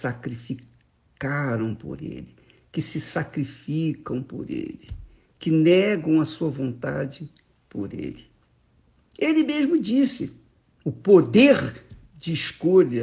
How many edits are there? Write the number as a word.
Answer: one